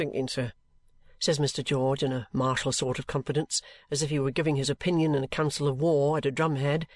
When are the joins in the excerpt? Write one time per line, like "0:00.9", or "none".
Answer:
none

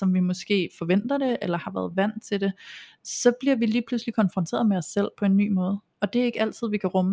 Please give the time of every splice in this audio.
none

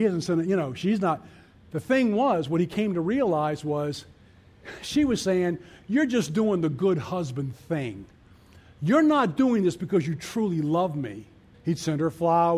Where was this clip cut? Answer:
0:11.5

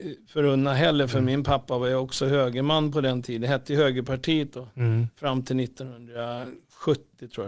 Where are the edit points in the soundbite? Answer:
none

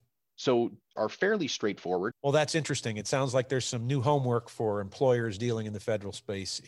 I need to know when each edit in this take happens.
0:01.0
0:02.1

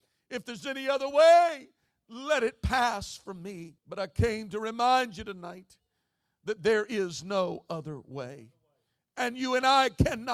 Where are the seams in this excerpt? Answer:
0:03.8

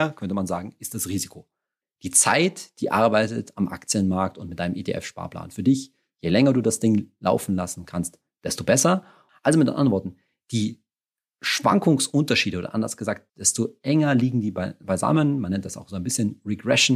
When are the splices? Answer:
0:01.8
0:09.3
0:13.3

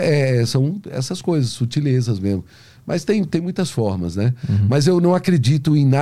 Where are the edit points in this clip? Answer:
none

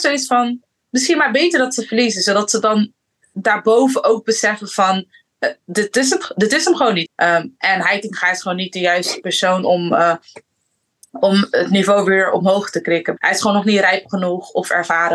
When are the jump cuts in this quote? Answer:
0:07.1
0:13.2

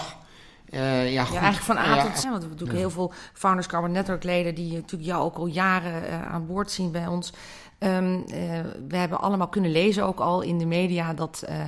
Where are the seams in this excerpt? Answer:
0:02.2
0:07.7

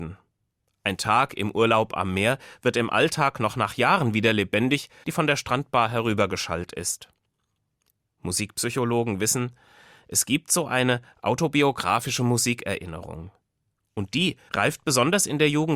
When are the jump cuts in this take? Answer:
0:05.0
0:14.5

